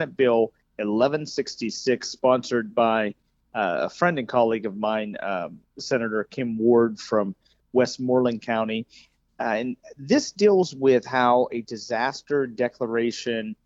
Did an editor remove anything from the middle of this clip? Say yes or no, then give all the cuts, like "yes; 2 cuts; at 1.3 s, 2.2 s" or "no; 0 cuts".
no; 0 cuts